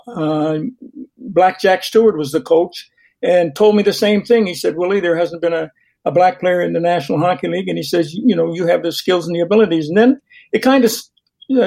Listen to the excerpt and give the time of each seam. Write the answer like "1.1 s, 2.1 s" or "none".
none